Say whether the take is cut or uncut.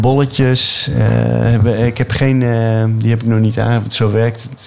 uncut